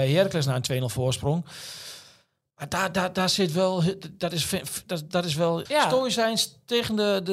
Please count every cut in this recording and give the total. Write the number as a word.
one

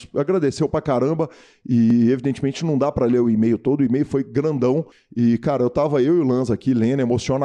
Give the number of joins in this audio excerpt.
zero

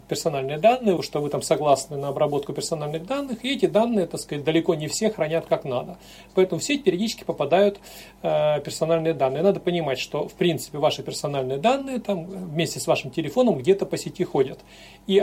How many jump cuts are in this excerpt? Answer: one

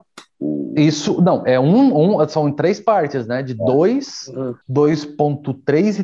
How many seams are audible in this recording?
one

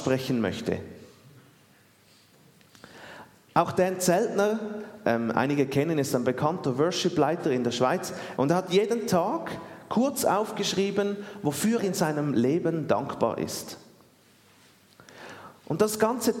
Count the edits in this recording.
two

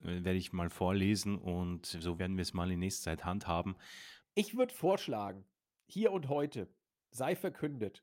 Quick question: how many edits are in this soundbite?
two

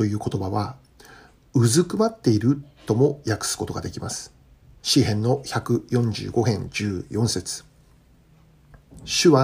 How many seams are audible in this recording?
one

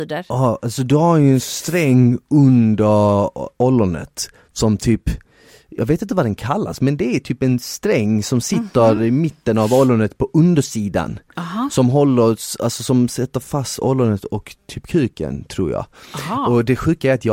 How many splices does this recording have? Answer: zero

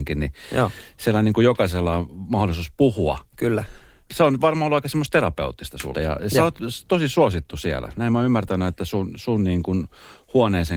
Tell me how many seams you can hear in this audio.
one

